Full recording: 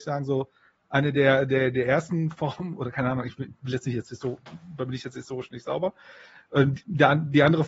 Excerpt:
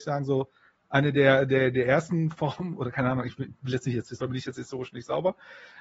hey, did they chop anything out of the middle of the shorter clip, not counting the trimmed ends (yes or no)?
yes